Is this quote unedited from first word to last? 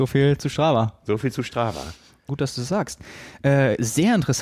no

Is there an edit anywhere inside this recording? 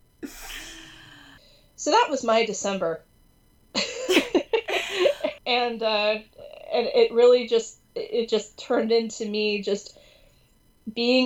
yes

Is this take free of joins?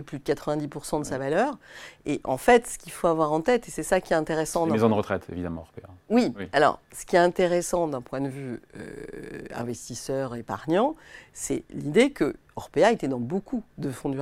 yes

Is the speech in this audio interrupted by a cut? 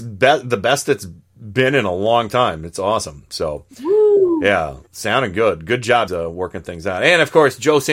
yes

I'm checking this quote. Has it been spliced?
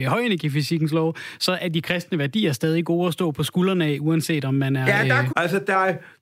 yes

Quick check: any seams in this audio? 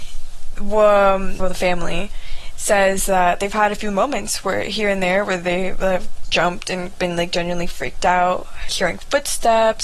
yes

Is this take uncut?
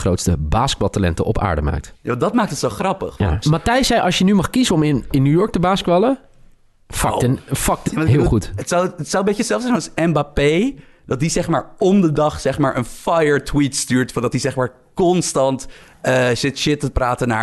no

